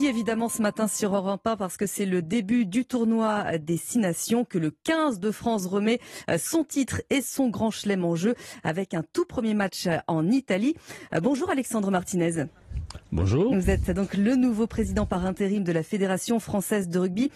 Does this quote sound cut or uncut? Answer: uncut